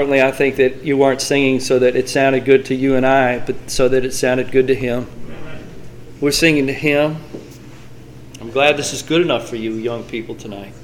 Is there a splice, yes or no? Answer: yes